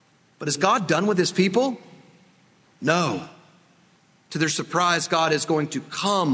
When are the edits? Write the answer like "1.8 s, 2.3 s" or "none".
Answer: none